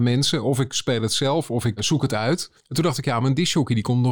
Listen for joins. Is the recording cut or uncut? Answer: cut